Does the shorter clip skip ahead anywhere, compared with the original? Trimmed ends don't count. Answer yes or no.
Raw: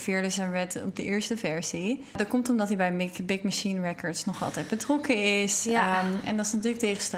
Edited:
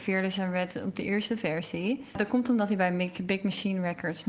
no